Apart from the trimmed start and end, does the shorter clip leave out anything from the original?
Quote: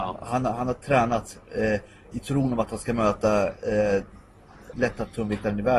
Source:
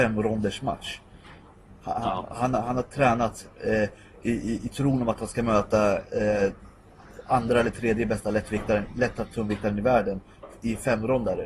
yes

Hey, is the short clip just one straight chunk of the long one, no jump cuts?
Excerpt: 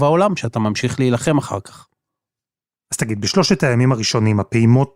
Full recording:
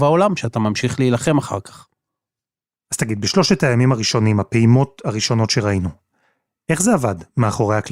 yes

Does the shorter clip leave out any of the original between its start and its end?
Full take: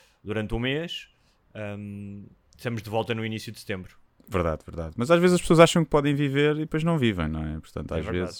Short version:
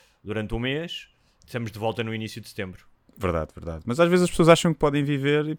yes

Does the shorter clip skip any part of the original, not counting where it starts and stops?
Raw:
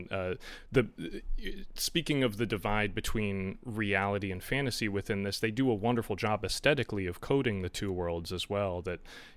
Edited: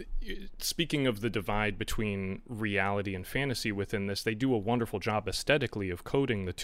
no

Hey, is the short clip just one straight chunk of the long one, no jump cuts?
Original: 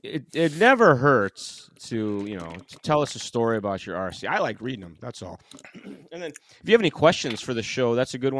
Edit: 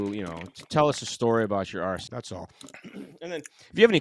no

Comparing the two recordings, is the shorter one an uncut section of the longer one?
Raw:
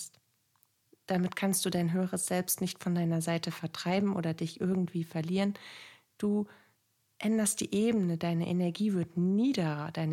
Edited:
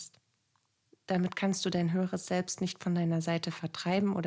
yes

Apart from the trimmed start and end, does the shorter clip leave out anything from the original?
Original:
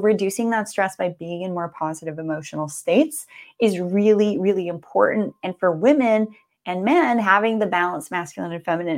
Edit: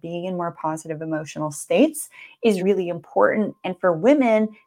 yes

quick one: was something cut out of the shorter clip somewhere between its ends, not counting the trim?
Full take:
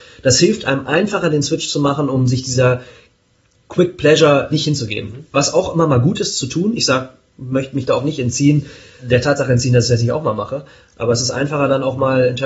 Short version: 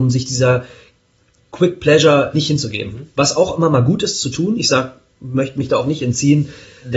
no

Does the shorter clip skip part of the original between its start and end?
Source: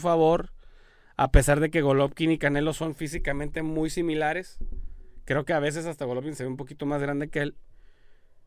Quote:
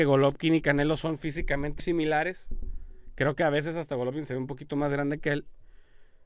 yes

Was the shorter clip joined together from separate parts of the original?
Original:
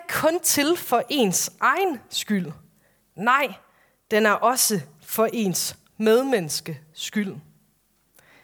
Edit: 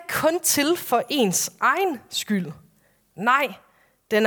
no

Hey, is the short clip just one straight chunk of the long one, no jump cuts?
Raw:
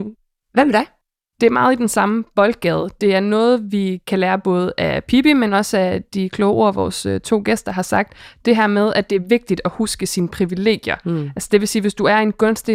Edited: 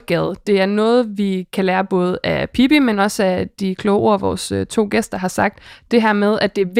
yes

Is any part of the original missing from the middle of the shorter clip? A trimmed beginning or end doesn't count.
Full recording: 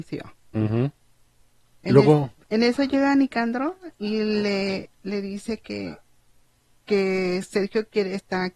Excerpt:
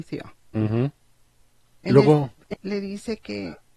yes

